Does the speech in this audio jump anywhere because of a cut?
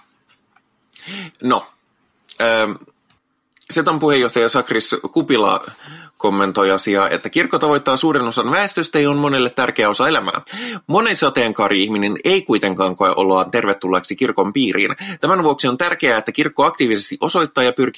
no; 0 cuts

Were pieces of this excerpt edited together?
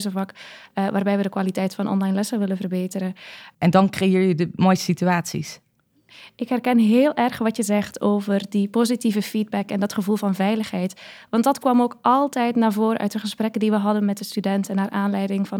yes; 1 cut; at 3.5 s

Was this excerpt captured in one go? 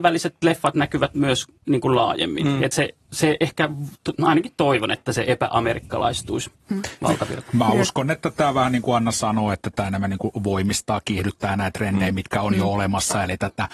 yes; 0 cuts

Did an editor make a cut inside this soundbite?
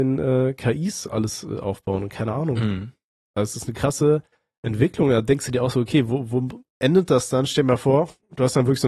no; 0 cuts

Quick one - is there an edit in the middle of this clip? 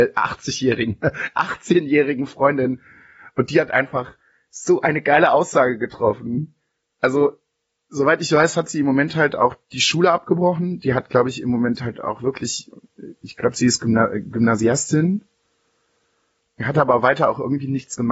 no; 0 cuts

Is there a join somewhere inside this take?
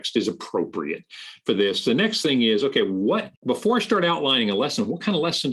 yes; 1 cut; at 3.4 s

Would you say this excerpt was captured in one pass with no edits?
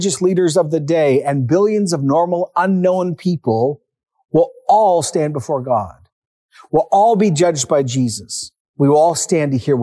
yes; 0 cuts

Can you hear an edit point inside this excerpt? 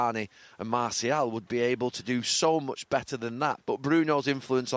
yes; 1 cut; at 3.6 s

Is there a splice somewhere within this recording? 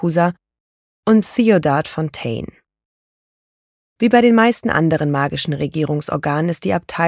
no; 0 cuts

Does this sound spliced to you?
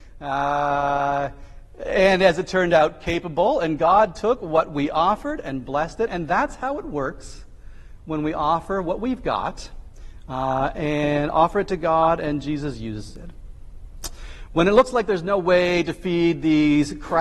yes; 1 cut; at 6.1 s

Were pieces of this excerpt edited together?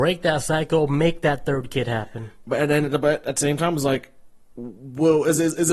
no; 0 cuts

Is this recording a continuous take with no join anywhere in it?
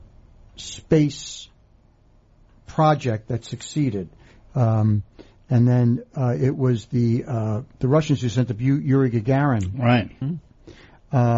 no; 2 cuts; at 7.7 s, 10.2 s

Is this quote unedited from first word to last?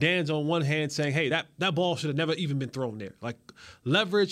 yes; 0 cuts

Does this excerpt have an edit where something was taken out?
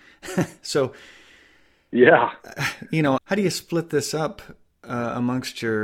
yes; 1 cut; at 3.2 s

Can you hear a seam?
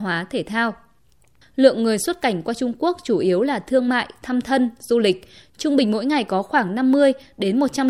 yes; 1 cut; at 1.4 s

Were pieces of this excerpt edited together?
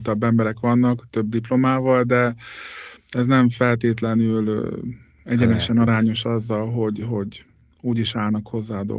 no; 0 cuts

